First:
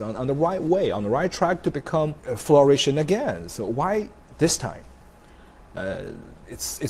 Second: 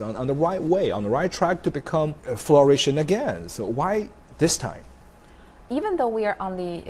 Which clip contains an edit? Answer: first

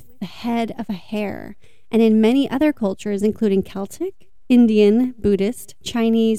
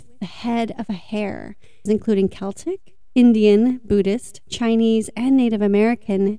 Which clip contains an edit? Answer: second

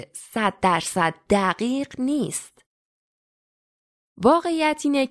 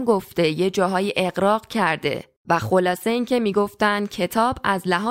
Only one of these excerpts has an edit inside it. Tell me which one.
second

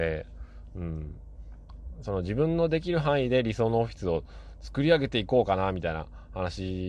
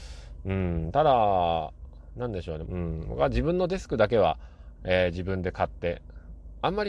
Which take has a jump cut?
second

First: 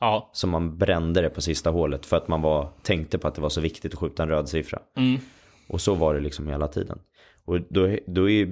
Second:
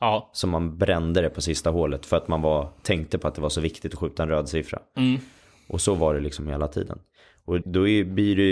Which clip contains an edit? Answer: second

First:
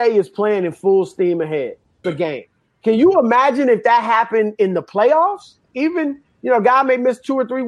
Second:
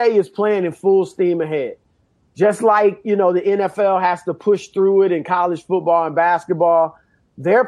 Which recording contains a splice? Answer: first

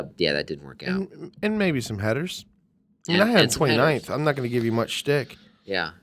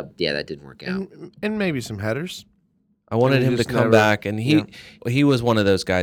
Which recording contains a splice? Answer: second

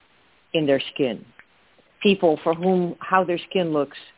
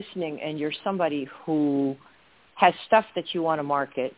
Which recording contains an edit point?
first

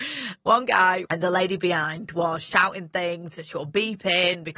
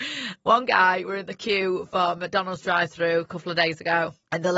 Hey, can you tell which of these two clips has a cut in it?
first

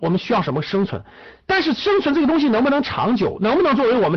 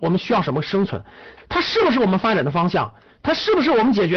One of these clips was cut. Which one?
second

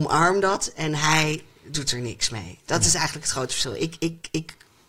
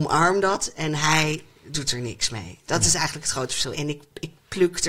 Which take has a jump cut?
second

